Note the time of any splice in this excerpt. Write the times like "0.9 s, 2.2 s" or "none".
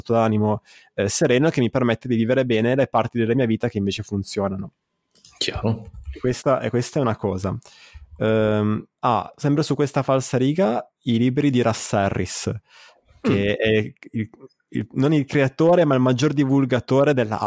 none